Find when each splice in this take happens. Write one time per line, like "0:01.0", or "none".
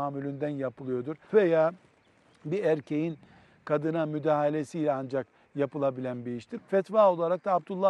0:01.3
0:06.6